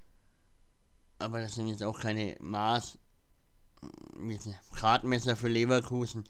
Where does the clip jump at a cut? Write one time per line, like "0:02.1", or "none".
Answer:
none